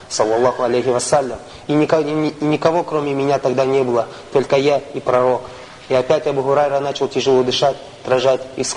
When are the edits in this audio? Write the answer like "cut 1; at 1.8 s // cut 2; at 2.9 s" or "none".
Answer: none